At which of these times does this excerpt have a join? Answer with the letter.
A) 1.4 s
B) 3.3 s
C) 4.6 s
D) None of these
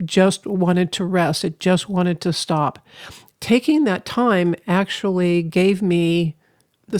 B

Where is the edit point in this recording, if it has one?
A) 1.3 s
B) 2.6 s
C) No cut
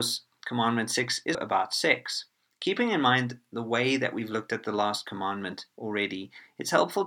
A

